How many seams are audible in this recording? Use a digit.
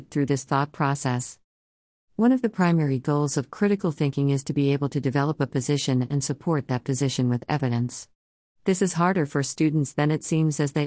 1